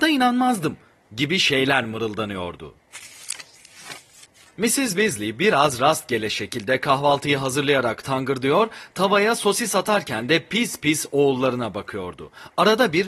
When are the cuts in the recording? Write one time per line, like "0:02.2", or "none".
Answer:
0:03.6